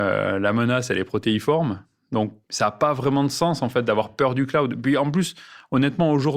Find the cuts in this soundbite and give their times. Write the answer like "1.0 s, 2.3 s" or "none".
2.4 s